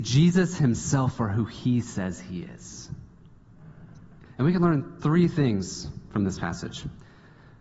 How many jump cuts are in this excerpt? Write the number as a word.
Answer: one